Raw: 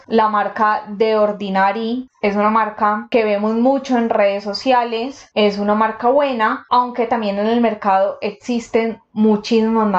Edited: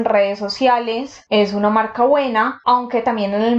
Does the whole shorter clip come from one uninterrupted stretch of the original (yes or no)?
yes